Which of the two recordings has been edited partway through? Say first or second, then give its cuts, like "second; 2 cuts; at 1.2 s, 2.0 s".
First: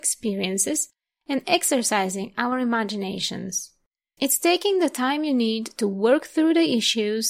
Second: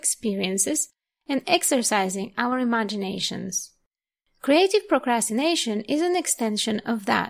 first; 1 cut; at 4.2 s